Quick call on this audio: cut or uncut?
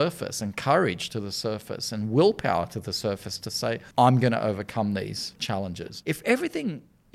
cut